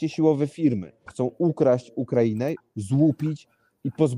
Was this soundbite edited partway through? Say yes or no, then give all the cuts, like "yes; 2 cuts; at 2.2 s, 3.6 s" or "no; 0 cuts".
yes; 2 cuts; at 1.1 s, 2.6 s